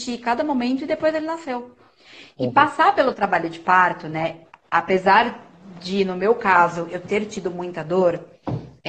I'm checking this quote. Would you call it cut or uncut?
uncut